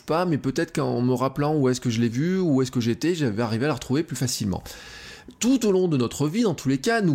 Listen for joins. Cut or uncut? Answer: uncut